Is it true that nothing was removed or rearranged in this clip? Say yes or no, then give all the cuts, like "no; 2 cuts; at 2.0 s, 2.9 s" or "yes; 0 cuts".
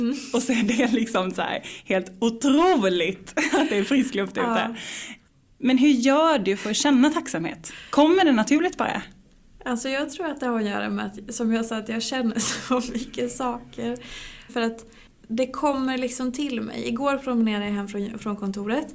no; 1 cut; at 14.5 s